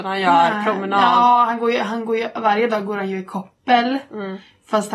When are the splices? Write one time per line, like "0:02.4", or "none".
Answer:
none